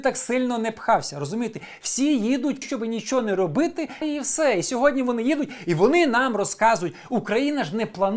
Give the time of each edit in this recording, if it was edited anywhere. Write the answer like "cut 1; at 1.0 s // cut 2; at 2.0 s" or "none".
cut 1; at 2.6 s // cut 2; at 4.0 s